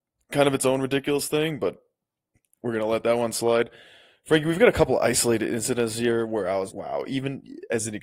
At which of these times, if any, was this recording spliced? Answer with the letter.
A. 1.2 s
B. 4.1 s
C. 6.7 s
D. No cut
C